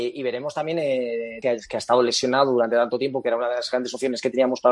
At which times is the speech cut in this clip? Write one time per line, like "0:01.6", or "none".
0:01.4